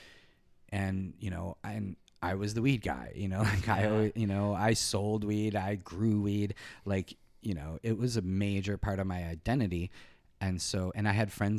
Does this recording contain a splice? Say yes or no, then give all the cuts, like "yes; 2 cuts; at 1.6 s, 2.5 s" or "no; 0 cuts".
no; 0 cuts